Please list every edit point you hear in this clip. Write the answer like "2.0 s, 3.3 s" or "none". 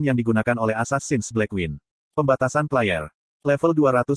2.0 s